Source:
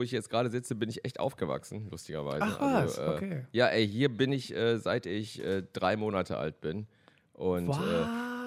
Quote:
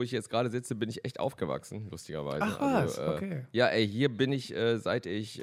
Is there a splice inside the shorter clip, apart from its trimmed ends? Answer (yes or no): no